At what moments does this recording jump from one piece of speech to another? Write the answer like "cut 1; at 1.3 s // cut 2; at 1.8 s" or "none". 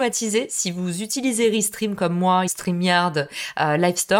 cut 1; at 2.5 s

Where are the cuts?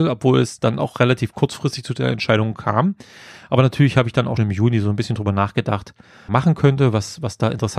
cut 1; at 4.4 s // cut 2; at 6.3 s

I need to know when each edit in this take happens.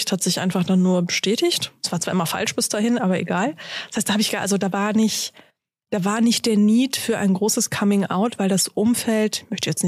none

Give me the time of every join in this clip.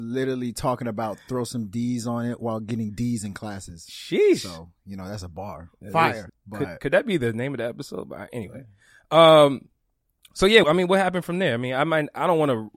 cut 1; at 6.3 s // cut 2; at 10.6 s

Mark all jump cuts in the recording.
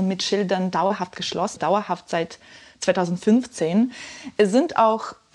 cut 1; at 1.6 s

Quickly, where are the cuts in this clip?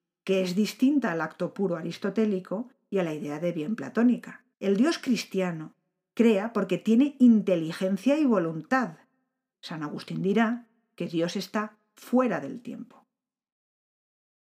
cut 1; at 4.5 s // cut 2; at 9.5 s

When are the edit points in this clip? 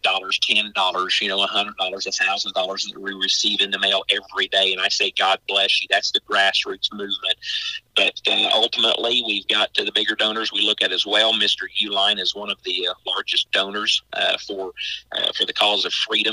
none

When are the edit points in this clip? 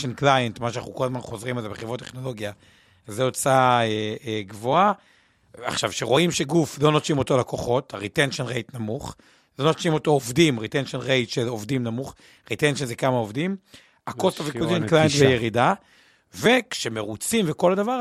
none

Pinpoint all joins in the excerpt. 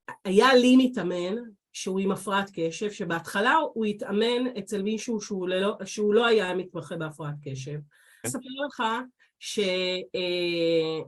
cut 1; at 8.2 s

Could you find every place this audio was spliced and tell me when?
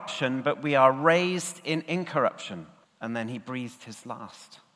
cut 1; at 2.8 s

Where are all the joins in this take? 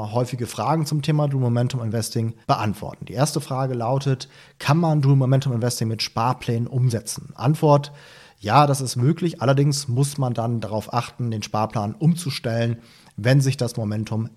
cut 1; at 2.4 s

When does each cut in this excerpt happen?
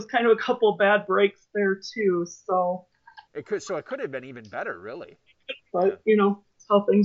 cut 1; at 3.3 s // cut 2; at 5.7 s

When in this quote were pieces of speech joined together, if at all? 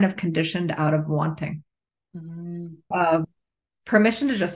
cut 1; at 2.9 s

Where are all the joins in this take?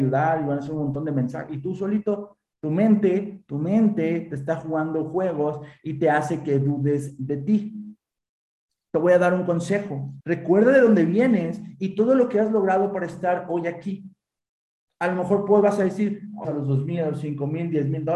cut 1; at 10.2 s // cut 2; at 16.4 s

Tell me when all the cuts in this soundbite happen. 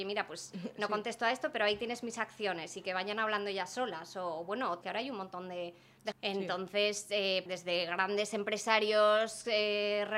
cut 1; at 4.8 s // cut 2; at 6.1 s // cut 3; at 7.5 s

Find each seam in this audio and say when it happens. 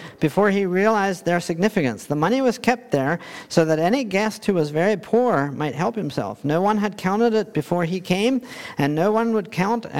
none

